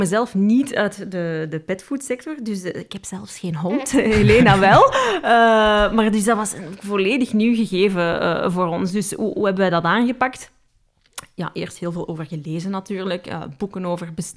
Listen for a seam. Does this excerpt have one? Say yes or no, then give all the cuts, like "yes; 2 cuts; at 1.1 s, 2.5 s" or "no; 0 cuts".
no; 0 cuts